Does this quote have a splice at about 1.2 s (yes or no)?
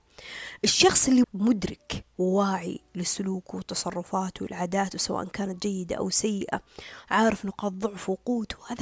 yes